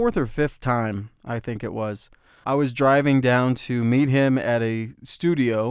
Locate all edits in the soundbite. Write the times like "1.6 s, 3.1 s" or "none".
2.4 s